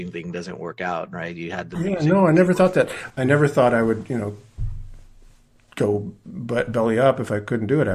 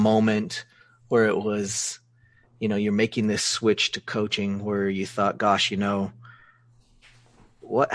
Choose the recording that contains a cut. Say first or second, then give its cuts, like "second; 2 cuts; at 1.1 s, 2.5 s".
first; 1 cut; at 3.1 s